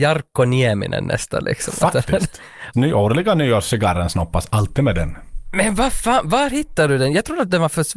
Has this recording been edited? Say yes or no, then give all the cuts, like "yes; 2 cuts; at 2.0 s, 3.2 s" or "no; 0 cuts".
yes; 1 cut; at 2.7 s